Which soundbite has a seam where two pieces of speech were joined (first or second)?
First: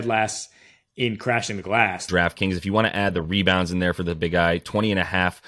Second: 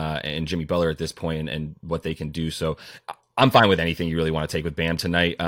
first